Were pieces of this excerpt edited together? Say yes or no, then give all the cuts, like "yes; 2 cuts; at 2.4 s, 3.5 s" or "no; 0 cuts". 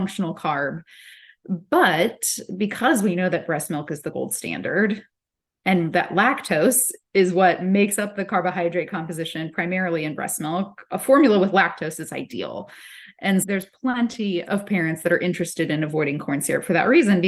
yes; 2 cuts; at 13.4 s, 14.4 s